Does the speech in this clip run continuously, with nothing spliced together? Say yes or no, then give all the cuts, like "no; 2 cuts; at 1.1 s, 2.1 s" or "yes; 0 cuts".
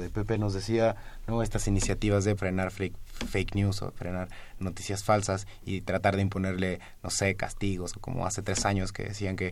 no; 2 cuts; at 2.4 s, 7.9 s